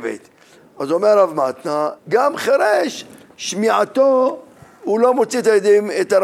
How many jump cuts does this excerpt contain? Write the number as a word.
one